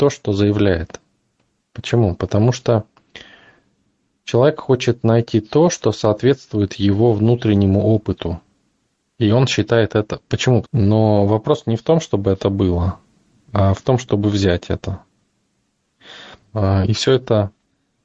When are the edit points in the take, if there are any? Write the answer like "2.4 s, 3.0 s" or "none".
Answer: 10.6 s, 16.4 s